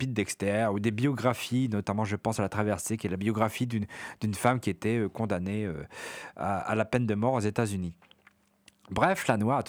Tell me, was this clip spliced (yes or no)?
no